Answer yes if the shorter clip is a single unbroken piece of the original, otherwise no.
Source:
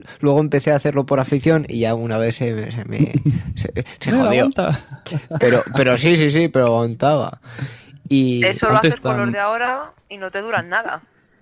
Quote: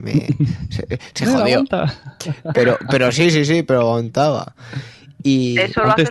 yes